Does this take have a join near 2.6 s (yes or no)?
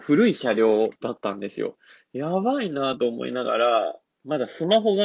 no